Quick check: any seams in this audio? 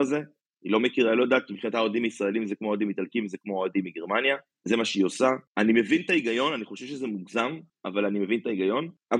no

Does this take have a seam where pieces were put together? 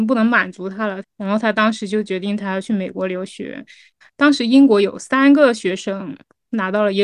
yes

